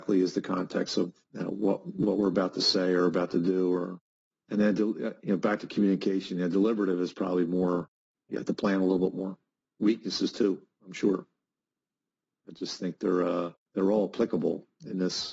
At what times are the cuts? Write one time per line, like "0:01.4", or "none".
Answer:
0:09.6
0:12.5

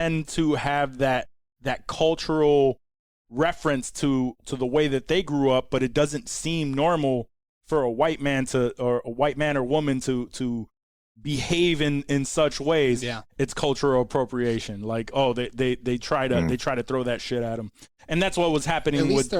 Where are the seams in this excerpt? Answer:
none

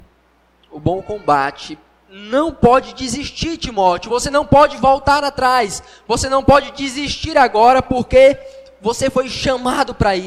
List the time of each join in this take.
none

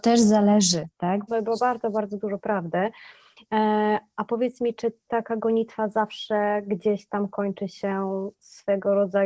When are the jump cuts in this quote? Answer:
0:01.3

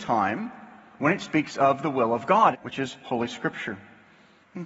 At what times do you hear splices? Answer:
0:02.5

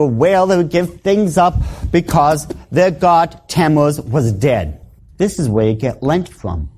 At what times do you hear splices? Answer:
0:05.1

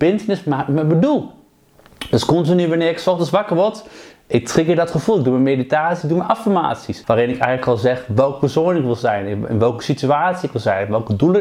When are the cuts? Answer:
0:06.0
0:07.0

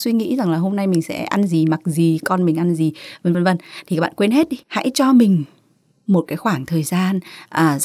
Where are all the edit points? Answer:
0:03.3
0:04.6

